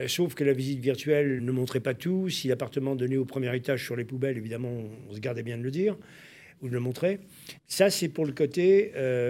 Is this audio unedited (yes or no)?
no